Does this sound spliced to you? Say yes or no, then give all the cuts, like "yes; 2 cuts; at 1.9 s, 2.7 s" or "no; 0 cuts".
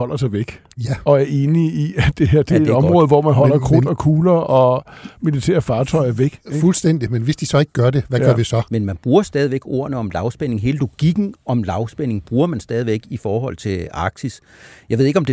yes; 1 cut; at 8.7 s